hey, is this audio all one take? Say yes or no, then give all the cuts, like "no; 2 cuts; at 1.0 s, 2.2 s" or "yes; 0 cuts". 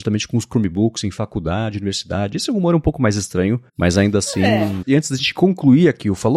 no; 2 cuts; at 3.7 s, 4.8 s